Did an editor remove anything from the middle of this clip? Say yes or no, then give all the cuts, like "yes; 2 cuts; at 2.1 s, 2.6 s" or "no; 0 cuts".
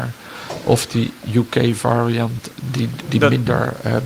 no; 0 cuts